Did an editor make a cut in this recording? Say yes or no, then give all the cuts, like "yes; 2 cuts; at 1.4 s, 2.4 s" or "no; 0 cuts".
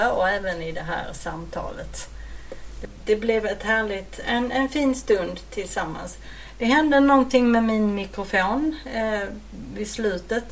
no; 0 cuts